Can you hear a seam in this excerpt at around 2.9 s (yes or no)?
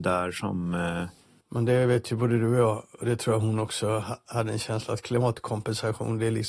yes